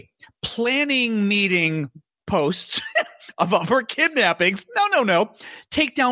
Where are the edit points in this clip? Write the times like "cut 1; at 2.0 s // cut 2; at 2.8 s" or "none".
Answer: none